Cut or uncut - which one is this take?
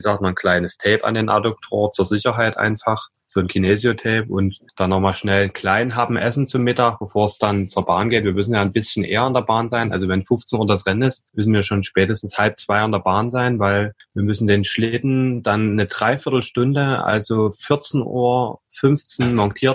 uncut